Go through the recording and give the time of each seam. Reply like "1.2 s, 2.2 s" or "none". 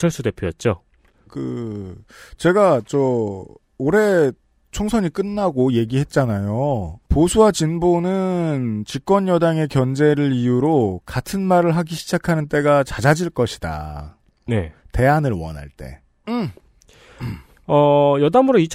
1.3 s, 14.5 s, 16.2 s